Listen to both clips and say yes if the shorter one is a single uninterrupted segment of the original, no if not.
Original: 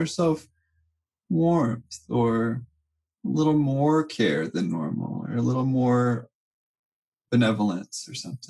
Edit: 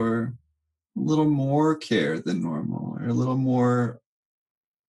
yes